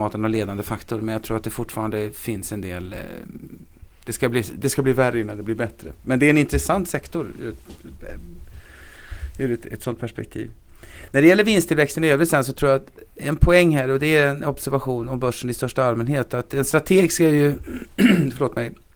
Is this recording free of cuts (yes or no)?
yes